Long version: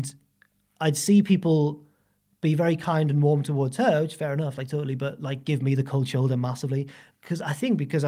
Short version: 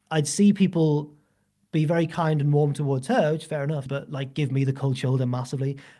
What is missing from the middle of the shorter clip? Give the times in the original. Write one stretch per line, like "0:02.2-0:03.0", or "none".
0:04.6-0:05.0